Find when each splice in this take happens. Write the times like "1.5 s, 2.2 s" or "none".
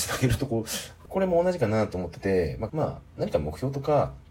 1.1 s, 2.7 s